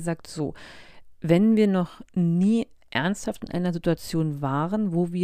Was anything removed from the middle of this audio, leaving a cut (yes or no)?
no